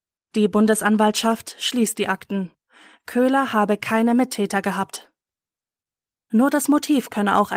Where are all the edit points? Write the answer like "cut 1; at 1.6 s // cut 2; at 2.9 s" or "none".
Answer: none